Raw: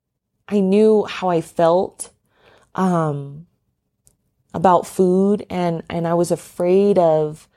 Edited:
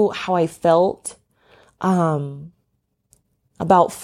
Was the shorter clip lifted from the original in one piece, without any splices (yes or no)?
yes